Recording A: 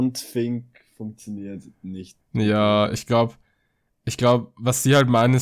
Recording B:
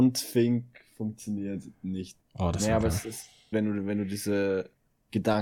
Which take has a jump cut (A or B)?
B